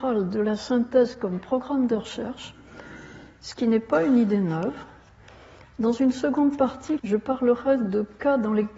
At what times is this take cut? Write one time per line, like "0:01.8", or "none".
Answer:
0:07.0